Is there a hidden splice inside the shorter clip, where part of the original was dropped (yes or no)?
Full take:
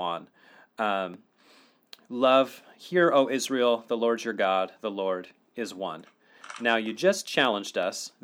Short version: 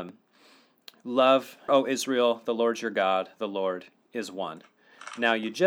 yes